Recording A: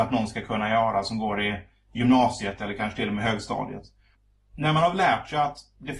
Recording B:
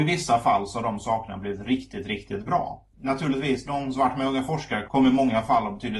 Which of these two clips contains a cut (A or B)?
B